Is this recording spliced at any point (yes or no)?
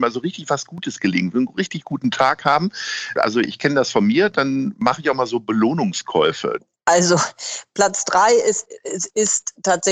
yes